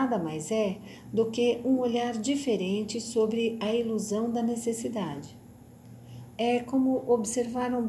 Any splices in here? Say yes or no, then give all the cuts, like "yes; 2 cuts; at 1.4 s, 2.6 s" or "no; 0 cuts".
yes; 1 cut; at 6.4 s